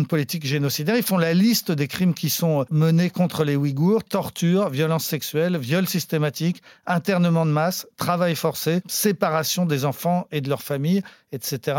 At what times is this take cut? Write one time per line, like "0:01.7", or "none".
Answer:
0:08.8